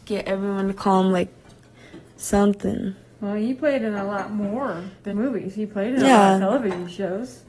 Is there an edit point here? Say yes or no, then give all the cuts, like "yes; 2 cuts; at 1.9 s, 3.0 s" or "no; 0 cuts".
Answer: yes; 1 cut; at 5.1 s